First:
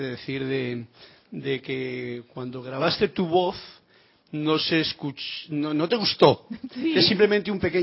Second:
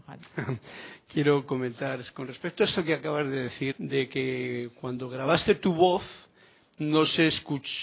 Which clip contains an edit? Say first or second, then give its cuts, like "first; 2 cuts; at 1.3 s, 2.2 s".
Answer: second; 1 cut; at 3.7 s